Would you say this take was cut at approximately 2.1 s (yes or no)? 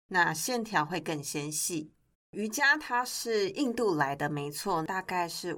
yes